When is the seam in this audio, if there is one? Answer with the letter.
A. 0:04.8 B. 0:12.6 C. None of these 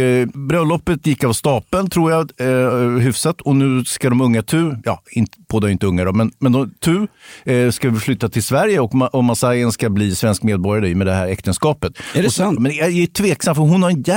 B